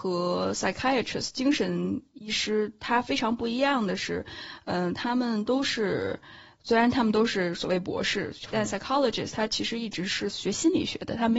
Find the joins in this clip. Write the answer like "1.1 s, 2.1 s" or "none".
8.5 s